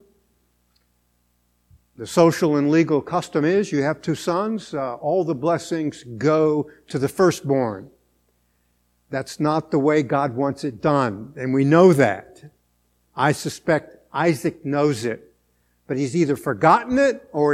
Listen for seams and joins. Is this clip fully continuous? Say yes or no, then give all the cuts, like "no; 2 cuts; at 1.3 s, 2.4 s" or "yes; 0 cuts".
yes; 0 cuts